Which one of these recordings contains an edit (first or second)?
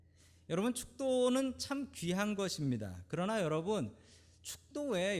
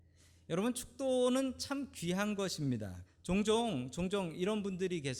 second